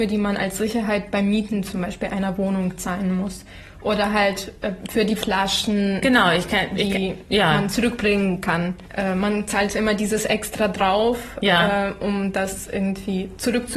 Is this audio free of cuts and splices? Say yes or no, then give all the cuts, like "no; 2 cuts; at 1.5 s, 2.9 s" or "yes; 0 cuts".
no; 1 cut; at 6.0 s